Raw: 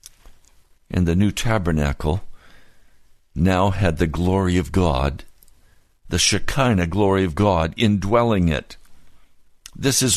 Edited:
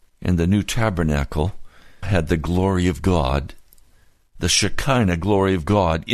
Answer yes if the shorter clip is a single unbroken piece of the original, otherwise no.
no